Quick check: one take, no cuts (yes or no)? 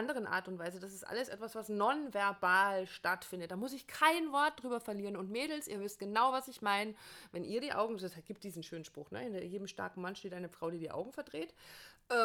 yes